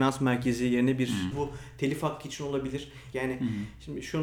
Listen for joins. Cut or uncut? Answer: cut